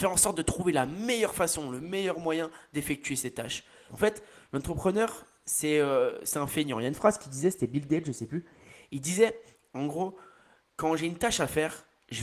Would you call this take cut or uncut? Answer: cut